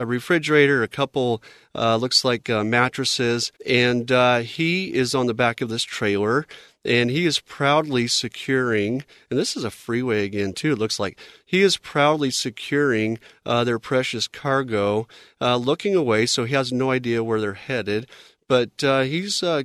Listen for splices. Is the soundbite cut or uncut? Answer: cut